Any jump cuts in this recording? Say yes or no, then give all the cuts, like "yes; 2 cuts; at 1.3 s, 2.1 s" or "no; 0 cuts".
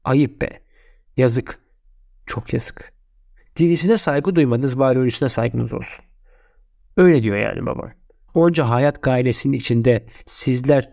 yes; 2 cuts; at 6.8 s, 8.3 s